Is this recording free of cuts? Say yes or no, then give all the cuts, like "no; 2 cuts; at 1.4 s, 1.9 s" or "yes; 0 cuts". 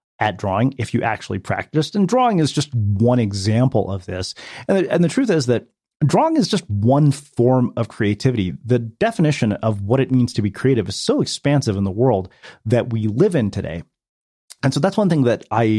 yes; 0 cuts